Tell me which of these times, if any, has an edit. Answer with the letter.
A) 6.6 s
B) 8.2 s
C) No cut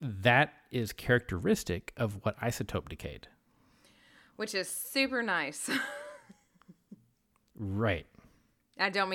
C